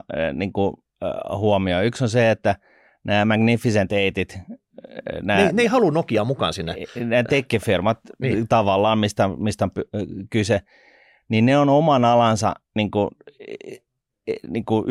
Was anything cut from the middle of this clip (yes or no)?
no